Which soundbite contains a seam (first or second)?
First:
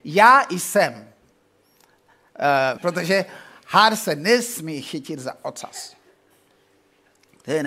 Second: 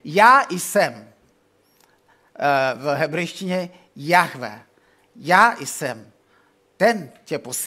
first